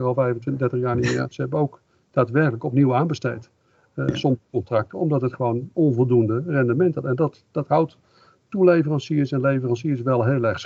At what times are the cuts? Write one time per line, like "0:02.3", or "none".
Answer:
0:01.3